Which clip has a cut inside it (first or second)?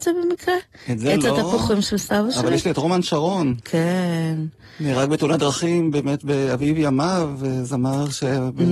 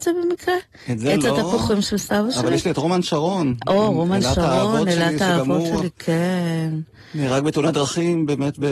first